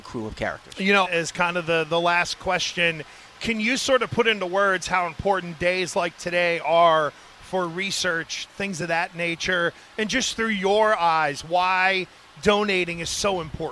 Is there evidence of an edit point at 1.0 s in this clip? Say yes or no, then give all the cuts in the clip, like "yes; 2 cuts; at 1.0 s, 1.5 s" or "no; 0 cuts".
yes; 1 cut; at 1.0 s